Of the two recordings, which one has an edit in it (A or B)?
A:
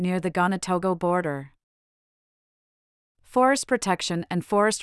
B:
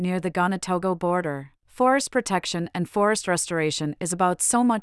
B